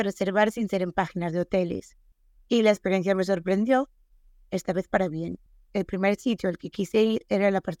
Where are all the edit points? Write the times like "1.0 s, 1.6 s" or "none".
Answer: 5.7 s